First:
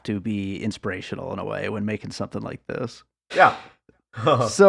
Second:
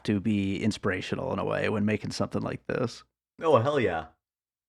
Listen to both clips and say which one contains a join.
first; 1 cut; at 3.3 s

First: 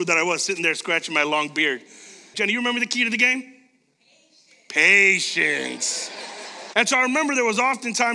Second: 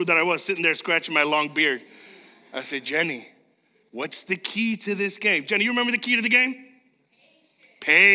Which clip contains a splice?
first; 2 cuts; at 2.3 s, 6.7 s

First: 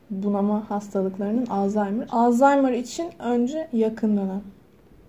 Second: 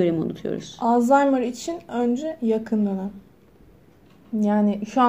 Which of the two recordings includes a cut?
first; 1 cut; at 2.1 s

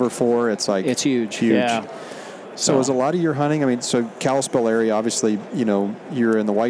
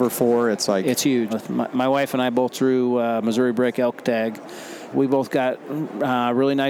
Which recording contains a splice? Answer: second; 2 cuts; at 1.3 s, 4.9 s

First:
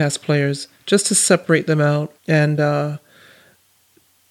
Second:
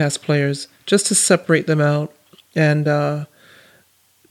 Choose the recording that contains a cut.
first; 1 cut; at 2.2 s

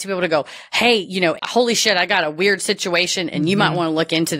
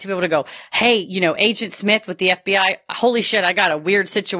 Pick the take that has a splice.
first; 1 cut; at 1.4 s

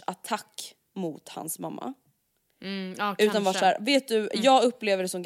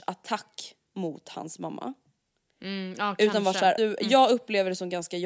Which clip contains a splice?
second; 1 cut; at 3.8 s

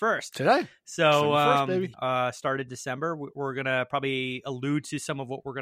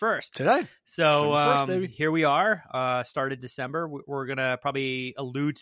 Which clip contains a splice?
first; 1 cut; at 1.9 s

